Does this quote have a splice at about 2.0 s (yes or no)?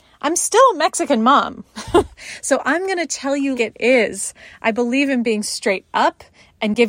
no